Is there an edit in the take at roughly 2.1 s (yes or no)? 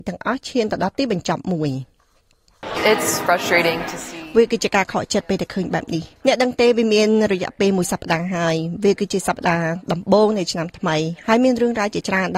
no